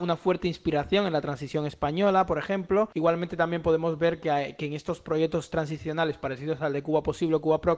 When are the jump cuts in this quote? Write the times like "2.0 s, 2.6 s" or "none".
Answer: none